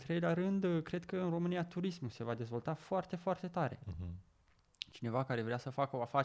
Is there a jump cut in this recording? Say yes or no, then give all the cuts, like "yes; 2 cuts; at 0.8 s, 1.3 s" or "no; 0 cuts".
no; 0 cuts